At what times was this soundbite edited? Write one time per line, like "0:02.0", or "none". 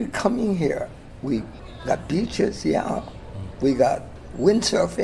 0:01.2